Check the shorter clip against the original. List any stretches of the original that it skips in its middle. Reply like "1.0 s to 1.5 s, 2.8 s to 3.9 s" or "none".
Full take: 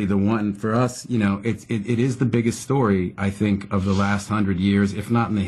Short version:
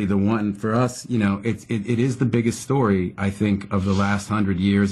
none